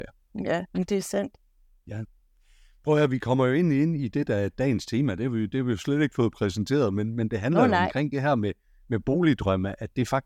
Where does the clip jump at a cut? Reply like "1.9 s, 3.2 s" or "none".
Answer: none